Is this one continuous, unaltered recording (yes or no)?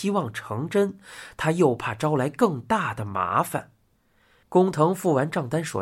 no